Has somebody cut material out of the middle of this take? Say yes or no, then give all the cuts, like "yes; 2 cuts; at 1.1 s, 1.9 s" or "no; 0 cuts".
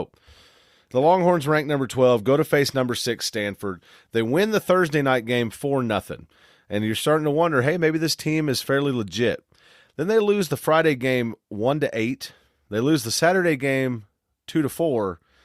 no; 0 cuts